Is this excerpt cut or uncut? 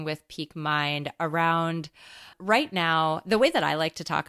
cut